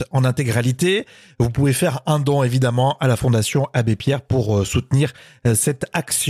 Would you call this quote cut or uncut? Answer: uncut